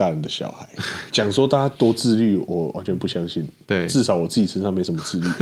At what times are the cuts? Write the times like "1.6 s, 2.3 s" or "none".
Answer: 1.1 s